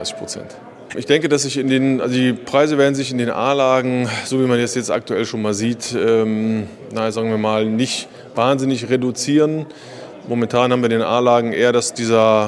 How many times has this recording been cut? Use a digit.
1